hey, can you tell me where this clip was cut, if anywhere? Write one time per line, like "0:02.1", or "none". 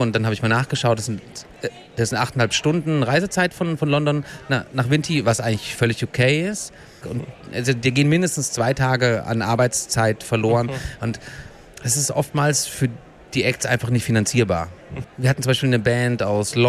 0:07.0
0:15.0